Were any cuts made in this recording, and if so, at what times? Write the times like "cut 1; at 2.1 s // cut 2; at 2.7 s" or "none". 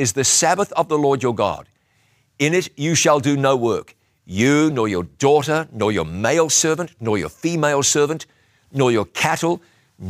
cut 1; at 4.7 s